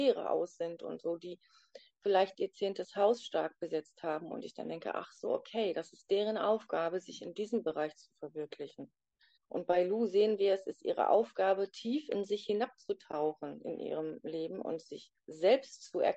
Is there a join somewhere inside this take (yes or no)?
yes